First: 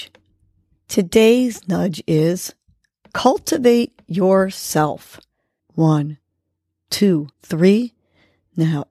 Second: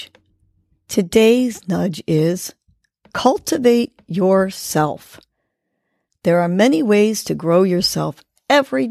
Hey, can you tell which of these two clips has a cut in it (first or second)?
first